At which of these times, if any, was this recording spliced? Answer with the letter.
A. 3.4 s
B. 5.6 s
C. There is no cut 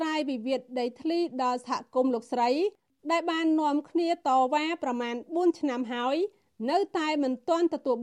C